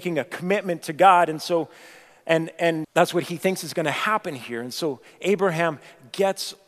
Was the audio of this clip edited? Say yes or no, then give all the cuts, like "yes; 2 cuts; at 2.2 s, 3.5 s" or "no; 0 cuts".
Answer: yes; 1 cut; at 2.8 s